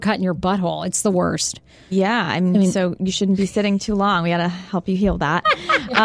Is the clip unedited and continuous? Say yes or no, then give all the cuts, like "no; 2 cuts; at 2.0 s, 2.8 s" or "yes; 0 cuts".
yes; 0 cuts